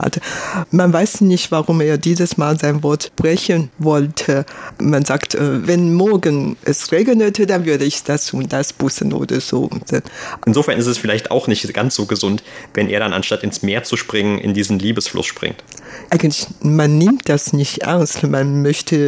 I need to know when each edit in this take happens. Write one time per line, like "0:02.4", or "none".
0:04.8
0:10.4
0:16.1